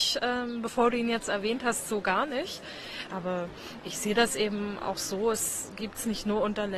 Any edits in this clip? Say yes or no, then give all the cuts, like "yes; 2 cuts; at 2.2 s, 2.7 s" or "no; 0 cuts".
no; 0 cuts